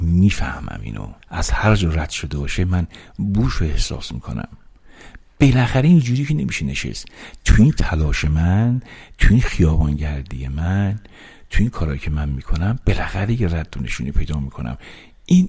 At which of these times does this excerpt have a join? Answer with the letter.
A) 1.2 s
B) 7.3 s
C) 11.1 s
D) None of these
A